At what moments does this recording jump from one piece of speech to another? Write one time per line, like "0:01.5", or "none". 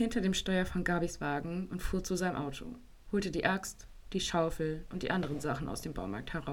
none